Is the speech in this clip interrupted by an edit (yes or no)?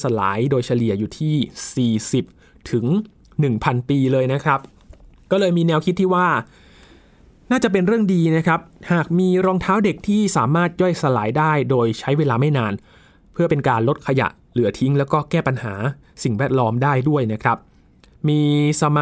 no